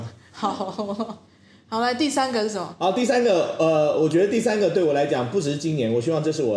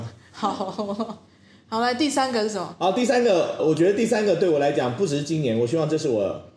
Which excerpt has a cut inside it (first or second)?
second